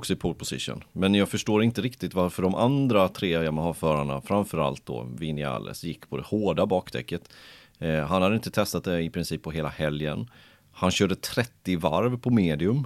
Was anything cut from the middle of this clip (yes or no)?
no